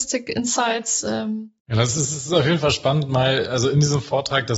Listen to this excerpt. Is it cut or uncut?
cut